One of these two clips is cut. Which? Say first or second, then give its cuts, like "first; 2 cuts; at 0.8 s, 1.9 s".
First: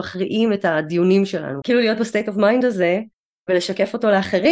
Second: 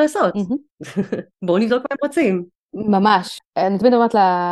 first; 1 cut; at 1.6 s